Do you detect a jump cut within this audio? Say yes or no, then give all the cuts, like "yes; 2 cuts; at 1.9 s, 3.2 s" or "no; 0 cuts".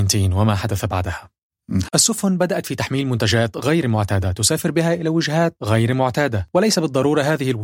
yes; 1 cut; at 1.9 s